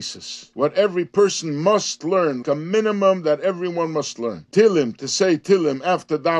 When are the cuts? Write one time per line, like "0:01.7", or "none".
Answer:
0:02.4
0:04.5